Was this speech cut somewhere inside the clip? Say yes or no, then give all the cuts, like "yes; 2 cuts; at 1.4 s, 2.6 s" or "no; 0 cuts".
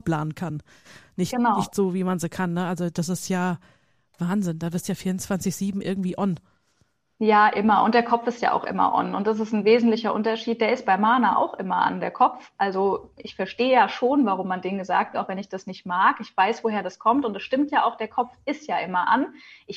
yes; 1 cut; at 15.1 s